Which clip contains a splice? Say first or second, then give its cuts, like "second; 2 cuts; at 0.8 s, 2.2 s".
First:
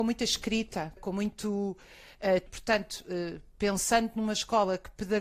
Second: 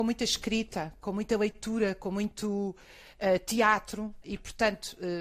first; 2 cuts; at 1.0 s, 2.5 s